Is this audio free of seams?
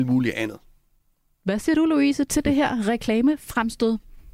yes; 0 cuts

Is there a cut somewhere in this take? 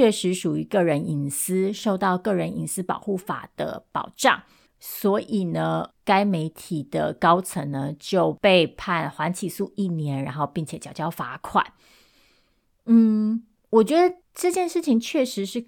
no; 0 cuts

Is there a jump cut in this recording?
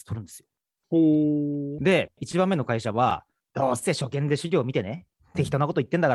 yes; 1 cut; at 1.8 s

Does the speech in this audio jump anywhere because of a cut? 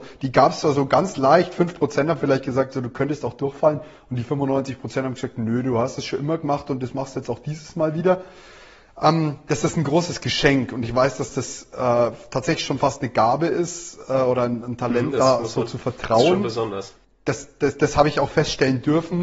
no; 0 cuts

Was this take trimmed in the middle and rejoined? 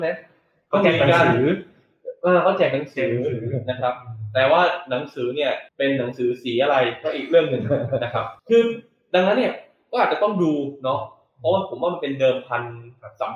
yes; 2 cuts; at 5.7 s, 8.4 s

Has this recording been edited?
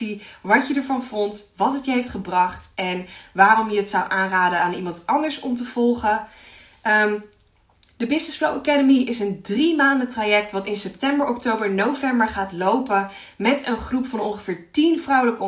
no; 0 cuts

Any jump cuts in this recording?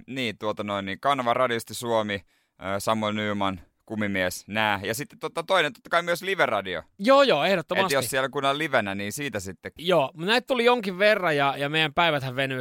yes; 1 cut; at 9.8 s

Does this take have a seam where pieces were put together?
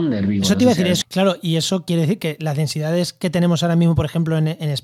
yes; 1 cut; at 1.0 s

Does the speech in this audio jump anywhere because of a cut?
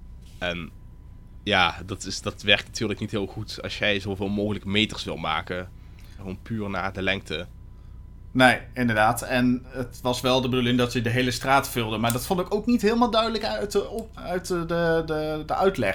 yes; 1 cut; at 6.2 s

